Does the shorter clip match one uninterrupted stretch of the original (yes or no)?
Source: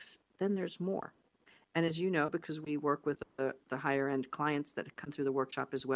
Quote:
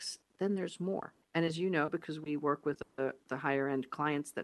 no